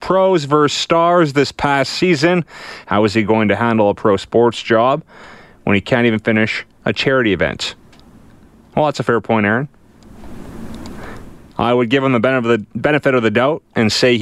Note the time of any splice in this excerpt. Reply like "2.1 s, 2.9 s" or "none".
2.8 s